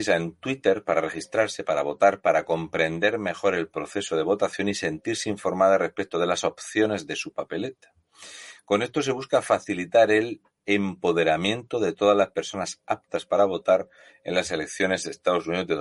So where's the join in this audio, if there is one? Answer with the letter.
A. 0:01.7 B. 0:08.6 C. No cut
C